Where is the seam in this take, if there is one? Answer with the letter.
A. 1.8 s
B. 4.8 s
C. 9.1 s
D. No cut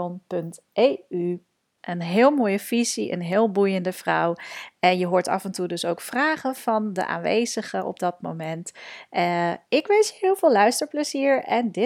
A